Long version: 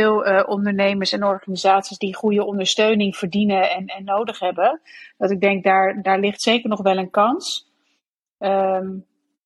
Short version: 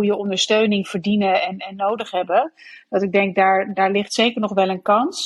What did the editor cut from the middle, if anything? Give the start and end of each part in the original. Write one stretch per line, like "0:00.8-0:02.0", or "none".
none

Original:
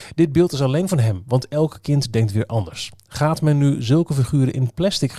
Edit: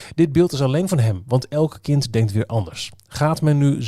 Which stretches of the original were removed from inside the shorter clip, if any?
none

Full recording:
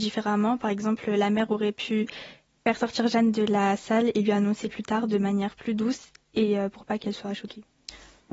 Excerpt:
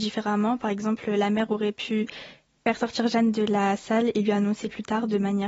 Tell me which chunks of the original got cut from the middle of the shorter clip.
none

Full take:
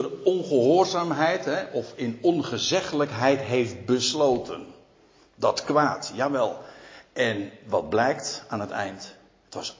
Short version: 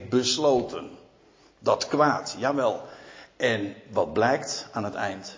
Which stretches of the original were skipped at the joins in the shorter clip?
none

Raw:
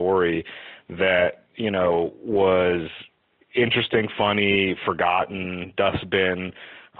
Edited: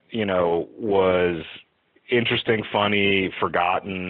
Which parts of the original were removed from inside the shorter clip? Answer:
none

